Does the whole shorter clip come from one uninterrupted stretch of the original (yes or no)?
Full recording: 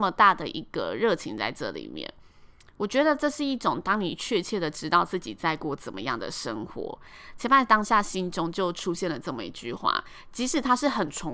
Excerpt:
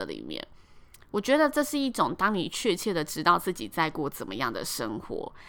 yes